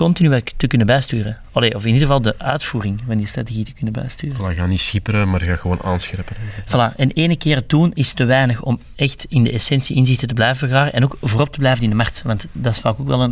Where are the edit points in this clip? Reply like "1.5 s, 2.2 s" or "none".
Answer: 8.9 s

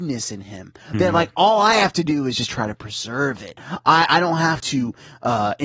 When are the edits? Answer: none

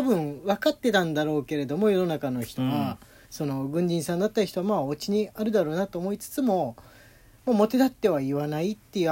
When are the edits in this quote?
none

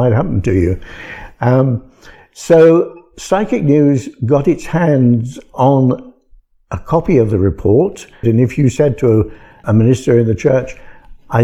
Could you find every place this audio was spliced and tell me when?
8.2 s, 9.6 s

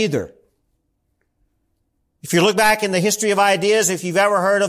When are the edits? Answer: none

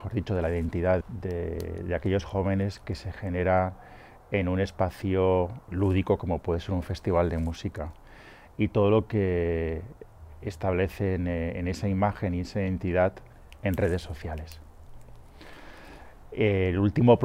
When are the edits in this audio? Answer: none

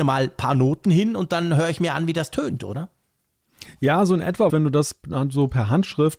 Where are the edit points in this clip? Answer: 4.5 s

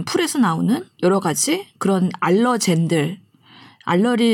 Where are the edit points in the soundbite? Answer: none

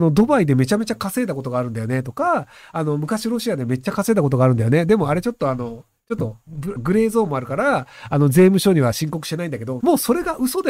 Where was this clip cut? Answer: 6.8 s, 9.8 s

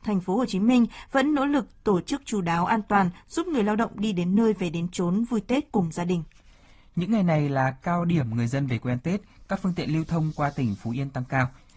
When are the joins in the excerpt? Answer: none

